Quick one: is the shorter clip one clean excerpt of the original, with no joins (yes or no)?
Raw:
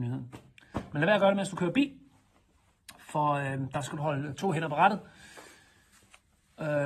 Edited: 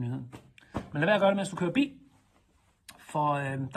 yes